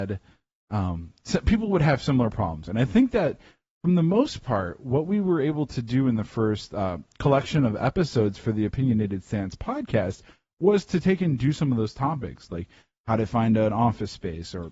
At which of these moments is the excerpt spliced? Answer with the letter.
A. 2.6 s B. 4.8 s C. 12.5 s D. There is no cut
A